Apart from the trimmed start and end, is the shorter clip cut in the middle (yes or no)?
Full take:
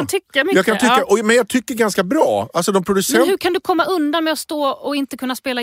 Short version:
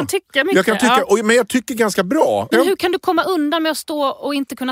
yes